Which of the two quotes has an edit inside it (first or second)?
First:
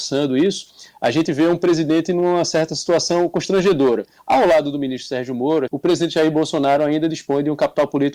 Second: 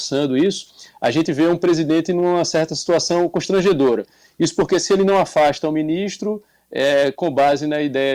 first